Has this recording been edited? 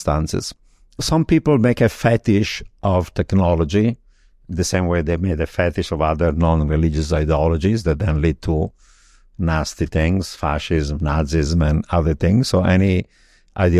no; 0 cuts

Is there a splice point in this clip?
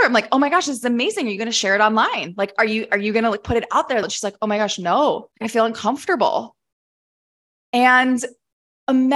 yes; 2 cuts; at 4.0 s, 5.3 s

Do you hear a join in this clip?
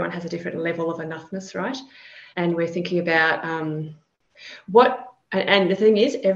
yes; 1 cut; at 2.3 s

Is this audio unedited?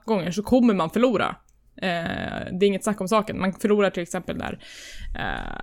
yes; 0 cuts

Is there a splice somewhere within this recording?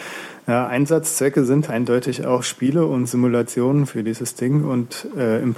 yes; 1 cut; at 1.7 s

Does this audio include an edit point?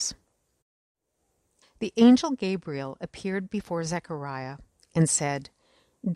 yes; 1 cut; at 1.6 s

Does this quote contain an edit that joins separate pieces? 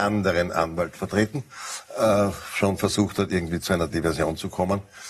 no; 0 cuts

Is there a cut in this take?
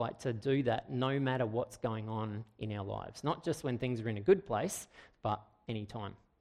no; 0 cuts

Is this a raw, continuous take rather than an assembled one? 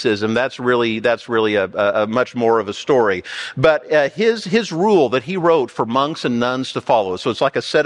yes; 0 cuts

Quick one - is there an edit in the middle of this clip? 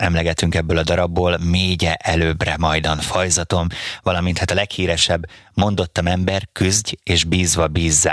no; 0 cuts

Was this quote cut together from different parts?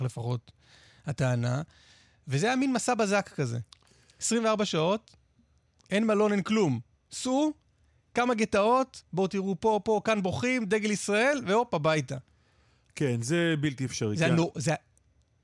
yes; 1 cut; at 9.0 s

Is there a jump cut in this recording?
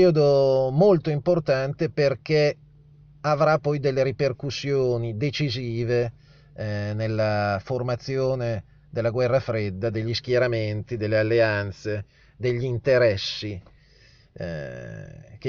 no; 0 cuts

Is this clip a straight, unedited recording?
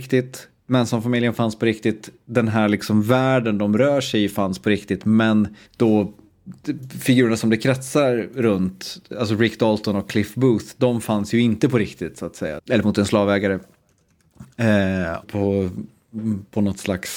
no; 3 cuts; at 5.6 s, 12.6 s, 15.2 s

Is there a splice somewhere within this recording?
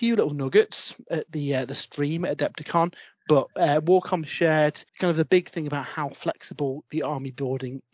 yes; 1 cut; at 4.9 s

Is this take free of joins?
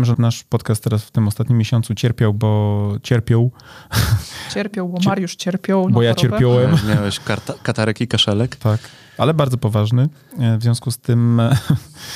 yes; 0 cuts

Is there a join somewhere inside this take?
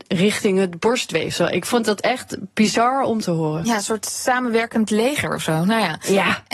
no; 0 cuts

